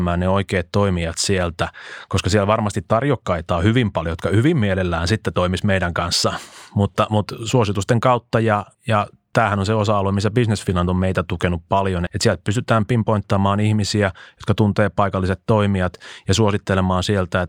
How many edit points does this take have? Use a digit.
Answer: 2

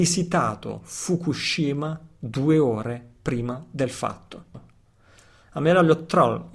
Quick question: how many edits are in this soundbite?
1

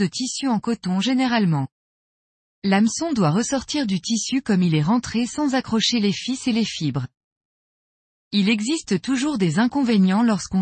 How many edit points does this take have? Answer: 0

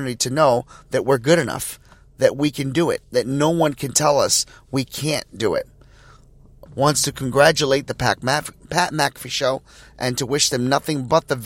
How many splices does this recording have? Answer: 2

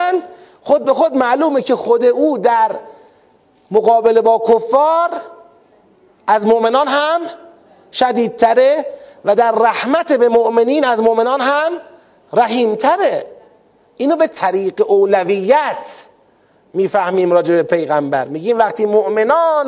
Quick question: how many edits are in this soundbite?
0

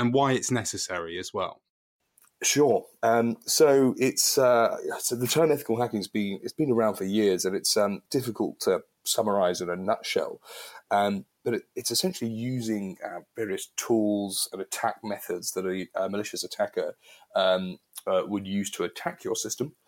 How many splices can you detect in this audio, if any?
1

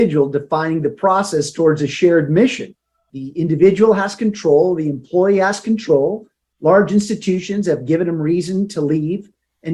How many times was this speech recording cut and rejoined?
1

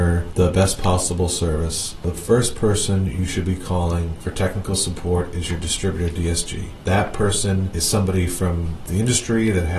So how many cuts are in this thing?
0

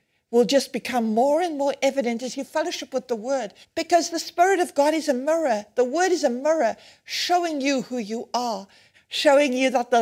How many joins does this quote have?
2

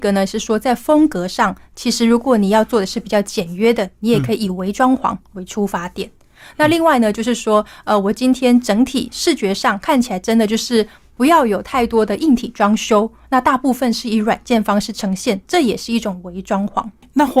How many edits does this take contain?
0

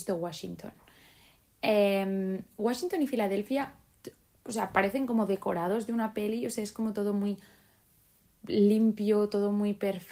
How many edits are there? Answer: 0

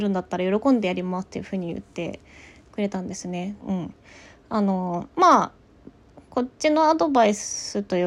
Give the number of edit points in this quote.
2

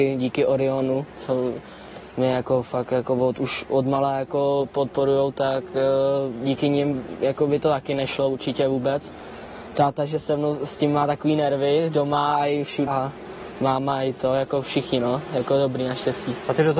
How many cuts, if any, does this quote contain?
1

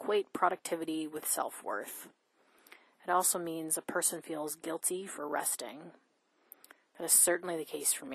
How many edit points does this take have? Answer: 0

